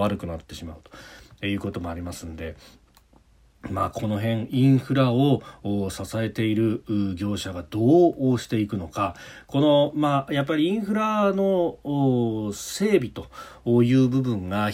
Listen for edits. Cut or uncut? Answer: uncut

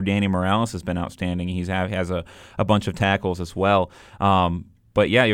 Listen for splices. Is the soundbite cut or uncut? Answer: uncut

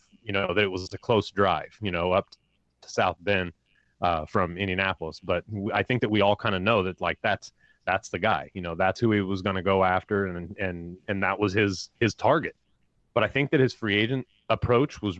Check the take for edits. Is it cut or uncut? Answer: uncut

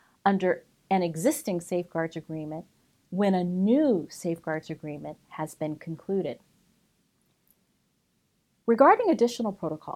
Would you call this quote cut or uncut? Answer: uncut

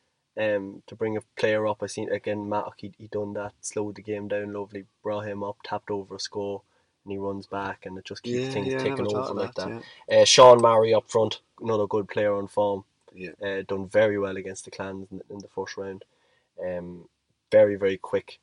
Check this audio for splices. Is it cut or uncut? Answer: cut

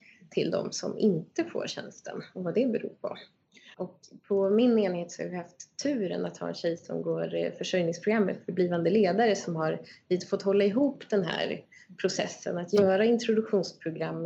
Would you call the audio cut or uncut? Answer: cut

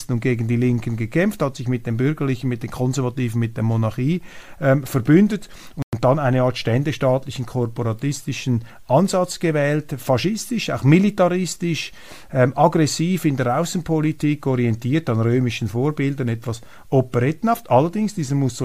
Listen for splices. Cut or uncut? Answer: uncut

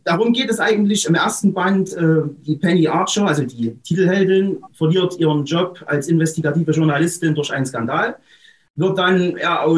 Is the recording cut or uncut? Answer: uncut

